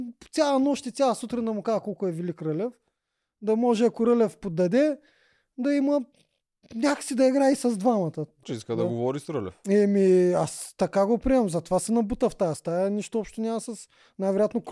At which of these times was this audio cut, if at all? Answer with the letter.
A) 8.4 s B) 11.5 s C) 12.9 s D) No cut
A